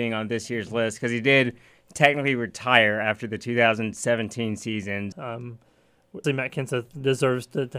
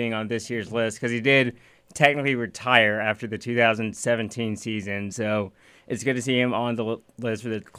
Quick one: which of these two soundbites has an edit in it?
first; 2 cuts; at 5.1 s, 6.2 s

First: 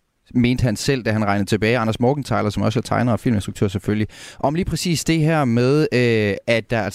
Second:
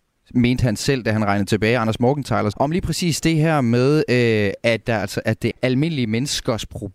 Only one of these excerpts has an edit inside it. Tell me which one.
second; 2 cuts; at 2.5 s, 5.5 s

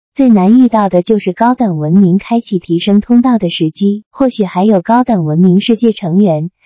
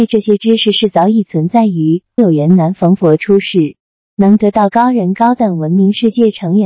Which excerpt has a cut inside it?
second; 1 cut; at 2.2 s

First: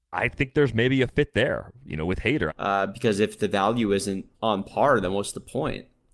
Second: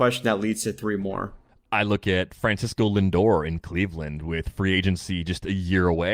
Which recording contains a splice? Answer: first; 2 cuts; at 2.5 s, 4.3 s

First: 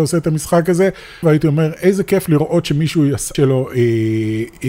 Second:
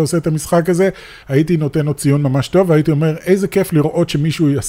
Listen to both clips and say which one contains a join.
first; 2 cuts; at 1.2 s, 3.3 s

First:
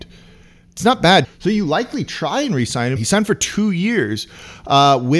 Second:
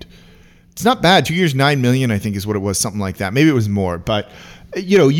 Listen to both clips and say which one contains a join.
first; 2 cuts; at 1.2 s, 3.0 s

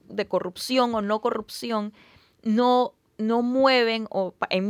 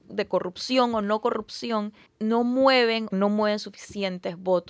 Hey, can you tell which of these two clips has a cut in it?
second; 2 cuts; at 2.1 s, 3.1 s

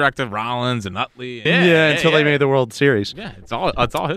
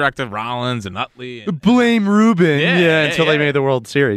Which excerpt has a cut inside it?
first; 1 cut; at 1.5 s

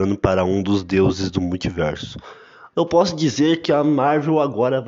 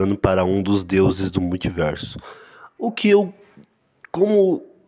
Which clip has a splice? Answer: first; 1 cut; at 2.7 s

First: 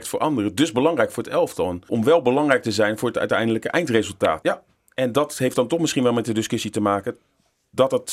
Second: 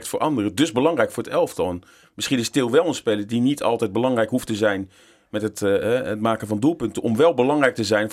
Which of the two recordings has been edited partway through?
first; 2 cuts; at 1.9 s, 4.4 s

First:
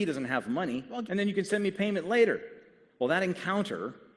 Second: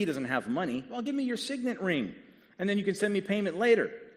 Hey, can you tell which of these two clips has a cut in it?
first; 1 cut; at 1.1 s

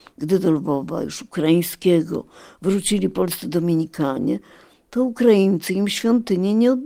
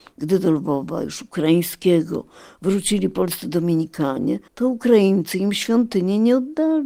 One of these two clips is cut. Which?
second; 1 cut; at 4.5 s

